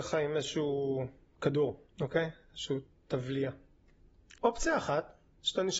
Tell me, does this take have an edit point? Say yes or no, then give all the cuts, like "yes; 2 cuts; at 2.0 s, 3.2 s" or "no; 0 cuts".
yes; 2 cuts; at 1.9 s, 4.4 s